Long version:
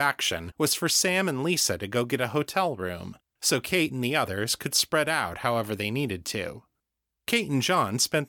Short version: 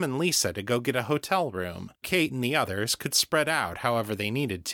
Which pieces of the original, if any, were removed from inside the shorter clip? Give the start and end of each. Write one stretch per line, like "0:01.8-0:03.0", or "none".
0:03.3-0:03.6

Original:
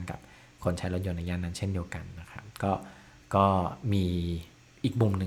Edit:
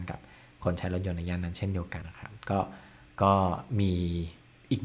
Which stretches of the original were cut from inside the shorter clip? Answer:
0:02.0-0:02.1

